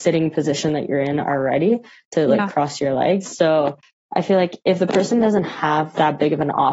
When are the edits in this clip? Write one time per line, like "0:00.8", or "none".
0:03.2